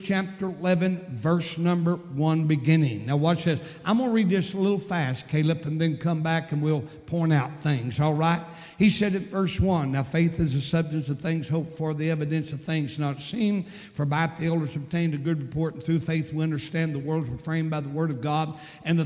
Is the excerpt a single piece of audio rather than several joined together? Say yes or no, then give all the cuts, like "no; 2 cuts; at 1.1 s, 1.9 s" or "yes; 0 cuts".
yes; 0 cuts